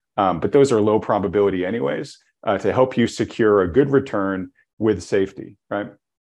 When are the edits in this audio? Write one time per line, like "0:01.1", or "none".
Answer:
none